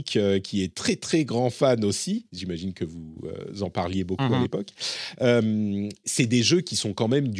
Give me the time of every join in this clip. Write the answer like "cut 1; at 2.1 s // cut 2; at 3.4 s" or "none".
cut 1; at 6.0 s